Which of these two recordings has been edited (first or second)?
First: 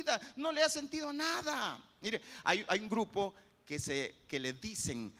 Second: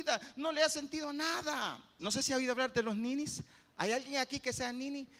second